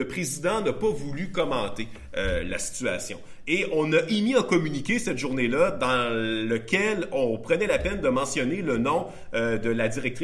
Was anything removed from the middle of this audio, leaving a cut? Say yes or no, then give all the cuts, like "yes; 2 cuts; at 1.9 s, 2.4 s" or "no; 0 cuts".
no; 0 cuts